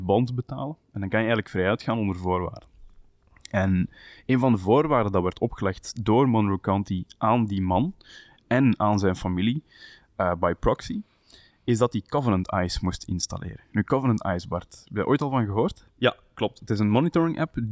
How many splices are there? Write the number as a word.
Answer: one